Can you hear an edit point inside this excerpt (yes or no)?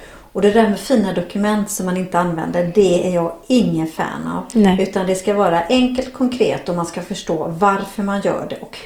no